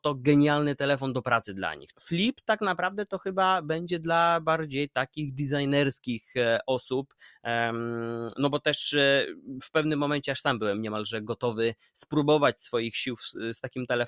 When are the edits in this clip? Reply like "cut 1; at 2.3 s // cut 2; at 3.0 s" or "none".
cut 1; at 1.9 s